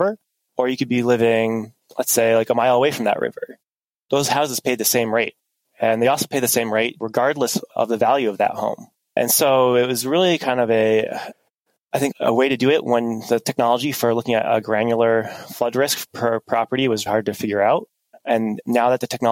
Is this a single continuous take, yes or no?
no